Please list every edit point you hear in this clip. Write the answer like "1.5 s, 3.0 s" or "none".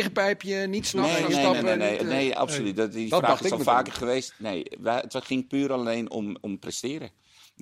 none